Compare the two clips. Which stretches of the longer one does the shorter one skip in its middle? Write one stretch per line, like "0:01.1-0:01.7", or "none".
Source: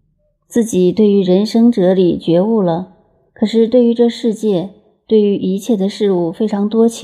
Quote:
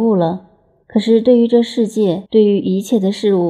0:04.7-0:05.0